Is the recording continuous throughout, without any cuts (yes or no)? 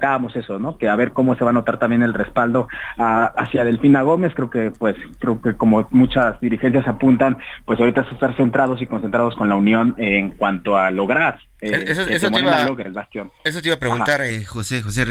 yes